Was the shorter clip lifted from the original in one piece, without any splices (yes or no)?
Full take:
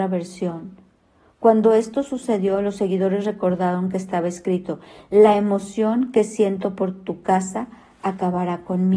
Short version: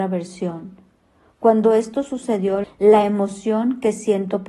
no